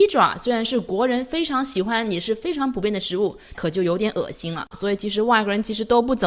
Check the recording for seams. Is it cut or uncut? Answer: cut